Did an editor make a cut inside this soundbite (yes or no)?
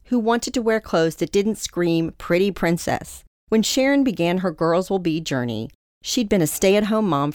no